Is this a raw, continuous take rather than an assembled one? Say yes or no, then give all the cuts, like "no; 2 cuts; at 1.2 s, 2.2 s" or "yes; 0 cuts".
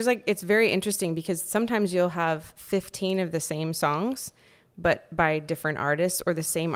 yes; 0 cuts